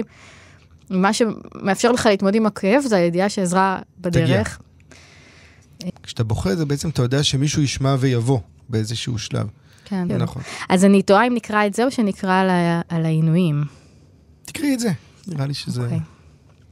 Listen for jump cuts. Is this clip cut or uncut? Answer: cut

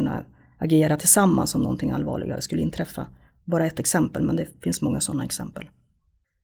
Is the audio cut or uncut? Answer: uncut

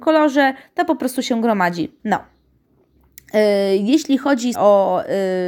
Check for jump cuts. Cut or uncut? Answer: cut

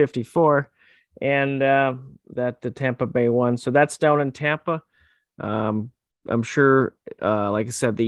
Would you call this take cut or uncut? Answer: uncut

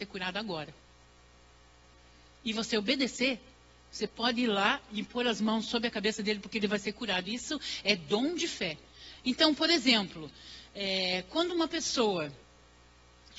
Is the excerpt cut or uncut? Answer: cut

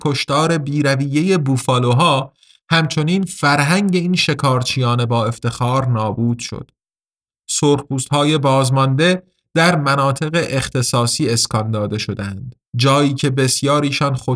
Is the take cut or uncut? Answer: cut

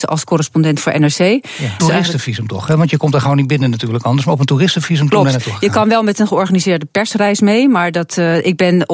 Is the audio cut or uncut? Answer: cut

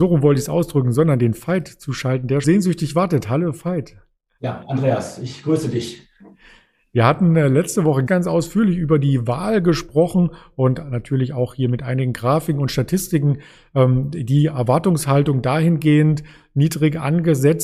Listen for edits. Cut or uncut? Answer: cut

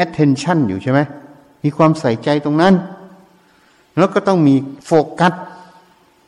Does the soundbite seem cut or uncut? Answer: uncut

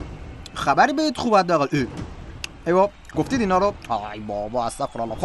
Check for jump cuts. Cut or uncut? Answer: cut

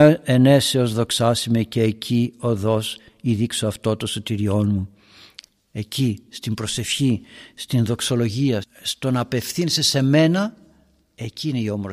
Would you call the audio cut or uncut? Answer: cut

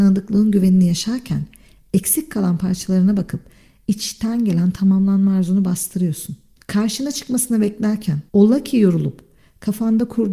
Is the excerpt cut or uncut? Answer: cut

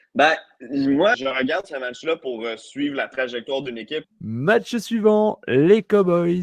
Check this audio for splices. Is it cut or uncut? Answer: cut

